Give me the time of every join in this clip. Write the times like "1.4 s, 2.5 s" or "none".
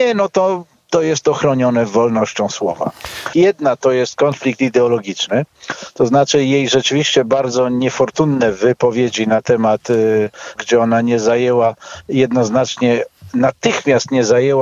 3.3 s, 10.6 s